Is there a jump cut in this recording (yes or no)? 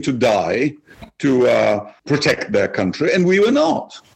no